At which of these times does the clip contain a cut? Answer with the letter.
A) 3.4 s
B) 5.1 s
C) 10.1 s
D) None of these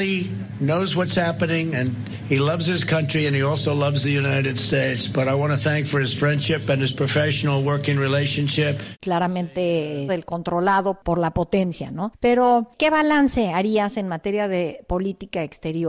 C